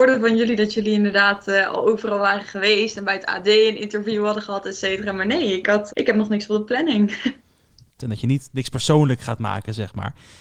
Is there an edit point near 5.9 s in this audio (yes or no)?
yes